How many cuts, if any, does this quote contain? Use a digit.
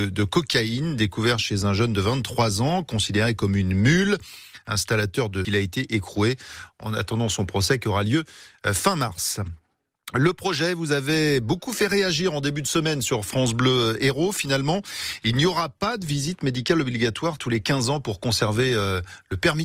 1